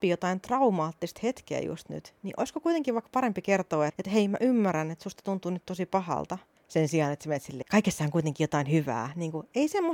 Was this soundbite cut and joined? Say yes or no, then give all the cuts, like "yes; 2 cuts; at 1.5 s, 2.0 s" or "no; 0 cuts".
yes; 3 cuts; at 3.9 s, 6.6 s, 7.6 s